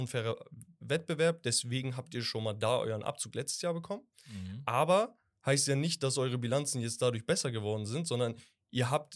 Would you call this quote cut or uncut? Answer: uncut